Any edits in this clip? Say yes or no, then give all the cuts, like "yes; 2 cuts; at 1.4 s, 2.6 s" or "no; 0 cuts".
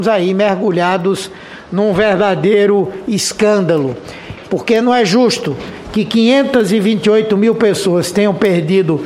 yes; 1 cut; at 4.4 s